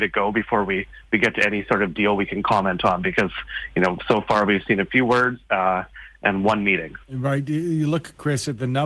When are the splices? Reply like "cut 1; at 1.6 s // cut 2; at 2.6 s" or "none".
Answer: cut 1; at 7.0 s